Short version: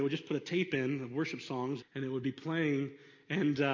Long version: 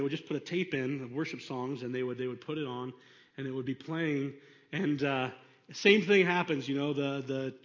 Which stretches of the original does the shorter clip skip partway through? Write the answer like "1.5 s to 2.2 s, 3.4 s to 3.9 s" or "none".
1.8 s to 3.2 s